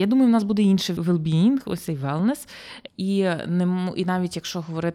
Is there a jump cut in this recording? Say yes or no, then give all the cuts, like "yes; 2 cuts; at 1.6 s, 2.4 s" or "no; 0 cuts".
yes; 2 cuts; at 1.0 s, 2.9 s